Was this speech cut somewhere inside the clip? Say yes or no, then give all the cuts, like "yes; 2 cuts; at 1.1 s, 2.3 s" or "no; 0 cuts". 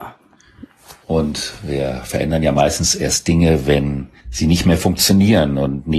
yes; 2 cuts; at 1.0 s, 4.2 s